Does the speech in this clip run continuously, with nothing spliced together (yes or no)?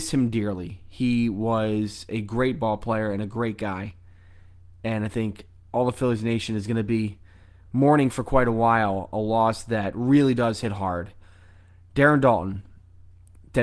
yes